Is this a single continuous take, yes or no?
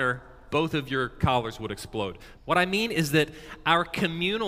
no